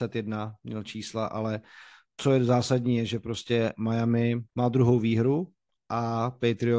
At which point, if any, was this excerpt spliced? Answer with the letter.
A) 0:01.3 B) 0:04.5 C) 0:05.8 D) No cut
B